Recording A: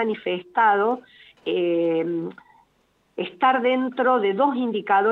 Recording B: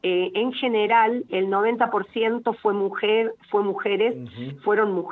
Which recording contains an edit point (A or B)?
B